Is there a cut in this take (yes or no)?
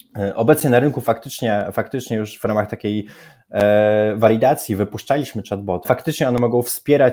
yes